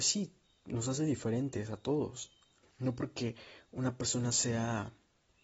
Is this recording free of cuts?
no; 1 cut; at 2.6 s

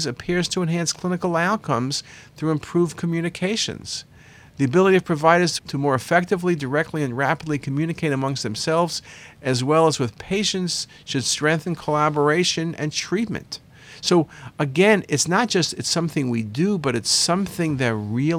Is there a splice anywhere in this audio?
yes; 1 cut; at 5.6 s

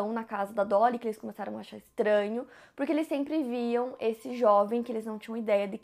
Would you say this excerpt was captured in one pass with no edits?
yes; 0 cuts

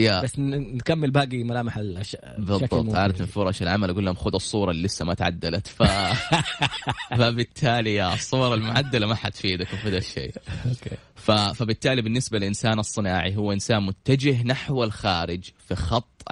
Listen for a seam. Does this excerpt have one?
no; 0 cuts

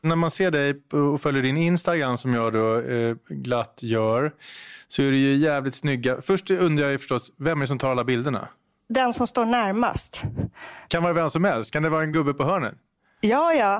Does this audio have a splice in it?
no; 0 cuts

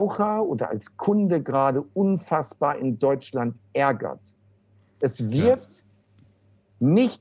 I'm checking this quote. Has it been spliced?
no; 0 cuts

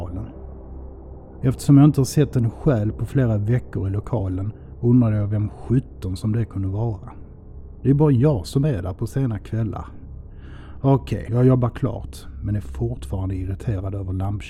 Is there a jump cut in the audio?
yes; 2 cuts; at 1.4 s, 11.3 s

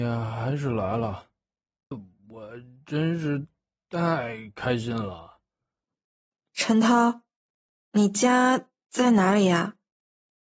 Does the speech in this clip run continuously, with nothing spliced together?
no; 1 cut; at 1.9 s

